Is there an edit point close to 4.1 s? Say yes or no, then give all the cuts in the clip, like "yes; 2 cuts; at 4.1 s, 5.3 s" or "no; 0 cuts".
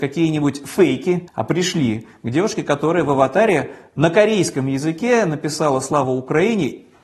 no; 1 cut; at 1.3 s